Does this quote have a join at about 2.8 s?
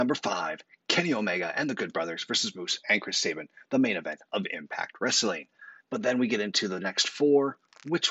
yes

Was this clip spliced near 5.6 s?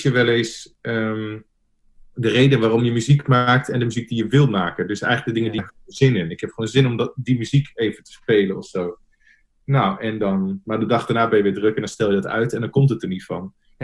yes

